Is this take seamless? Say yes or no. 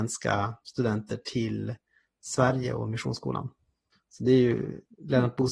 yes